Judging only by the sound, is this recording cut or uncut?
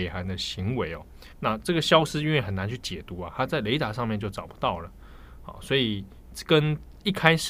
cut